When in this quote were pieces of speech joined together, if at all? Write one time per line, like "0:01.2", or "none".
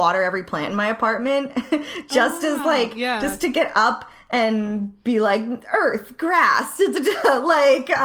none